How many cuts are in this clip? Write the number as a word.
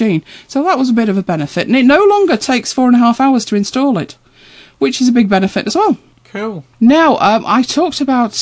one